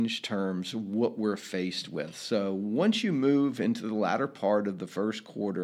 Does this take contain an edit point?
no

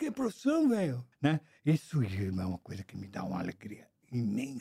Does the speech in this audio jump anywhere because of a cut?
yes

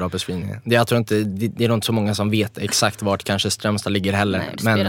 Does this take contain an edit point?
no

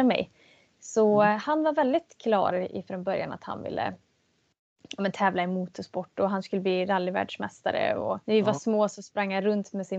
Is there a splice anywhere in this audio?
yes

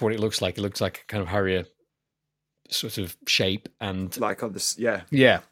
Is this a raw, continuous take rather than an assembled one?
yes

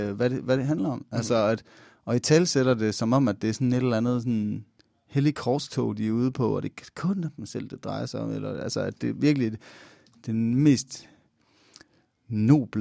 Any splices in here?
no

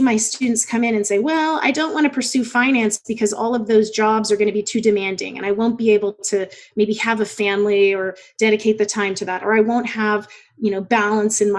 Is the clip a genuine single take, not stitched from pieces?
yes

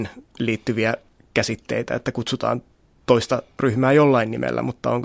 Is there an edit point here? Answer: no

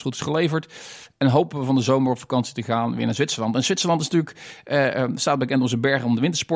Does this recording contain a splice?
no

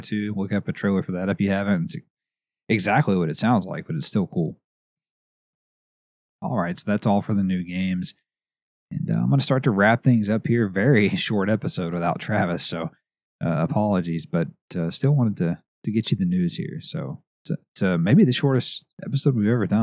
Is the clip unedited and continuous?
yes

